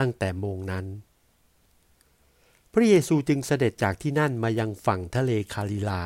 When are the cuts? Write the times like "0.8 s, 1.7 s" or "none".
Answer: none

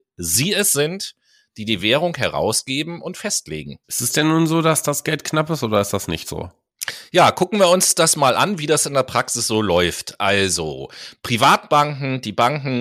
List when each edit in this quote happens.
3.8 s

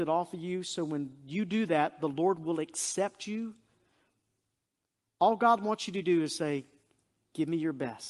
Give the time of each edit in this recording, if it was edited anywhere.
none

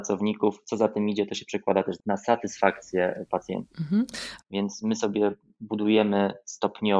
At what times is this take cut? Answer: 4.4 s

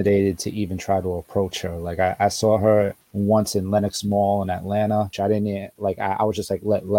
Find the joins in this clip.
3.0 s, 5.1 s

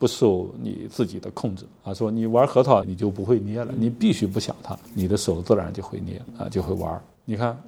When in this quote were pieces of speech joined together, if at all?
2.8 s

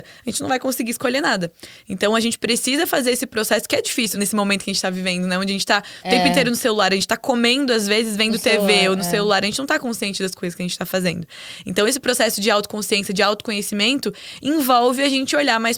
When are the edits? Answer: none

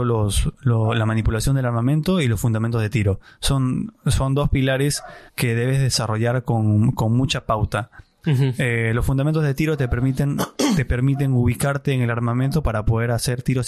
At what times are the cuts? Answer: 5.3 s

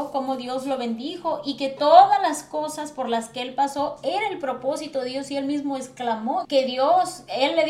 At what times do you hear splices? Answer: 6.4 s

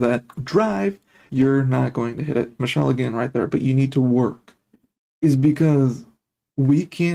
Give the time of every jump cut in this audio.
1.3 s, 5.0 s

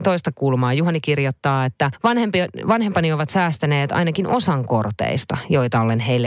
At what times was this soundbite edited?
none

